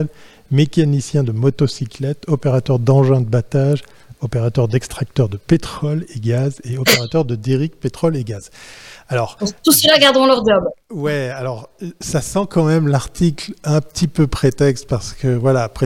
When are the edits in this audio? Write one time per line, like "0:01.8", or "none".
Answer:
none